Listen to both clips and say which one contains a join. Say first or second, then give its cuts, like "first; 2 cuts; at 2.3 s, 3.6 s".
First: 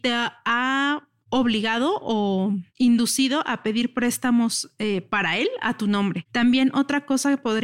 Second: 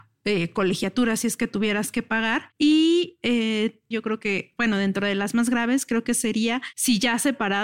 second; 1 cut; at 3.9 s